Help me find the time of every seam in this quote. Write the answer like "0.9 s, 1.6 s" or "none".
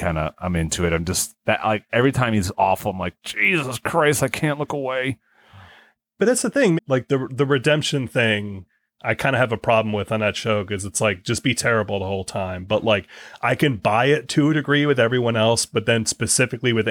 6.8 s